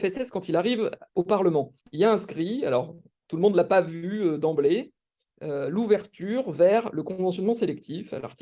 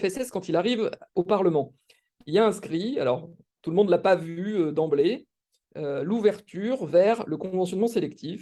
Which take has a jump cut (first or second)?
first